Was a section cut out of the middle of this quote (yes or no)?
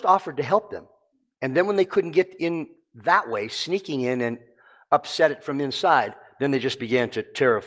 no